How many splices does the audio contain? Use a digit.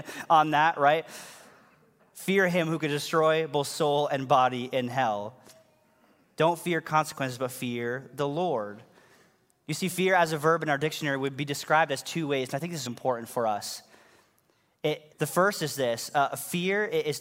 2